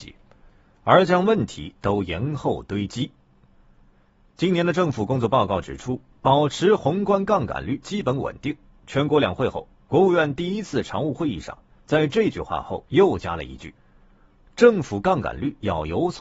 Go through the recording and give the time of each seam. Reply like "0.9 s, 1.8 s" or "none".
none

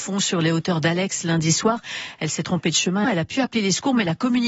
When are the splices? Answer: 3.0 s

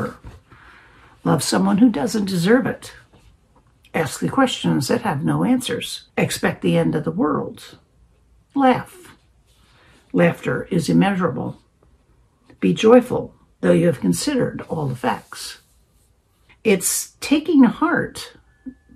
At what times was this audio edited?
6.1 s, 16.5 s

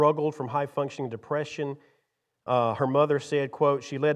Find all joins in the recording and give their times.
none

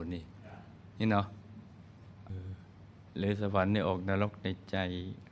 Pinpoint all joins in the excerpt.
2.3 s

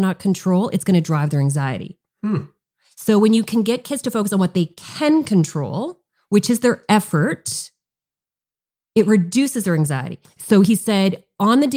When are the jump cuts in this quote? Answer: 10.2 s

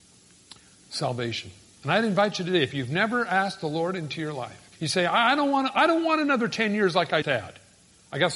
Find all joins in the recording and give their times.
4.7 s, 7.2 s

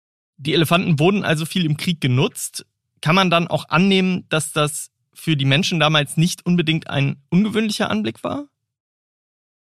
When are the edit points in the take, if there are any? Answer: none

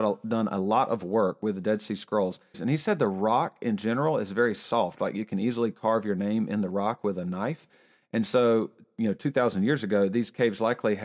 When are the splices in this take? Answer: 2.5 s

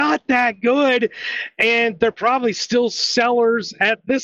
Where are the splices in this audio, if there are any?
none

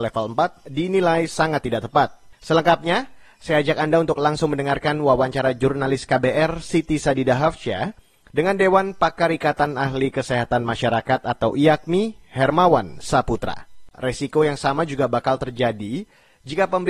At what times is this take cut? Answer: 2.3 s, 13.9 s

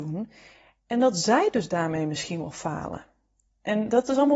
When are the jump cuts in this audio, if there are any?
none

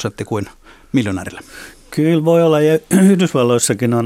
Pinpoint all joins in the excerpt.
none

